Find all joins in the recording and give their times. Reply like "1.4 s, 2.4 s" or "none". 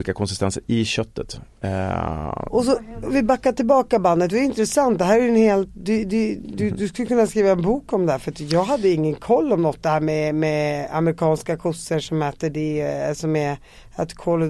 none